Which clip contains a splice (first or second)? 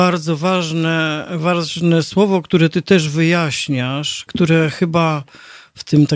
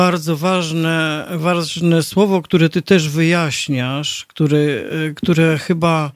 first